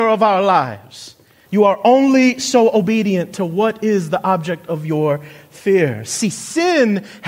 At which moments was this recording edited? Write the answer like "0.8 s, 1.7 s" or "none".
1.4 s